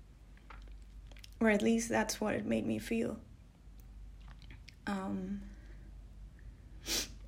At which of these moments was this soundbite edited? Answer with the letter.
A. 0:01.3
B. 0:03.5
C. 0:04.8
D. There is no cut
A